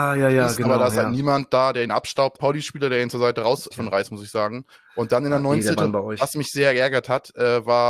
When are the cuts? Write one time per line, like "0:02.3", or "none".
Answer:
0:02.4
0:03.7
0:05.8